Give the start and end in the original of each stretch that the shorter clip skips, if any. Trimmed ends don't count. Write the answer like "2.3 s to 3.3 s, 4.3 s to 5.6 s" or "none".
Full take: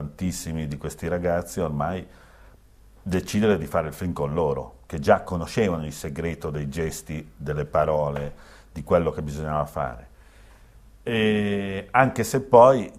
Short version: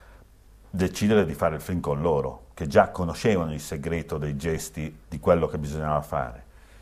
7.3 s to 8.6 s